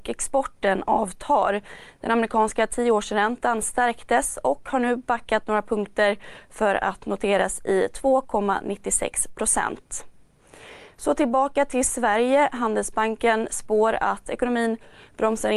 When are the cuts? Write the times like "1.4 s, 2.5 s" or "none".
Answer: 2.0 s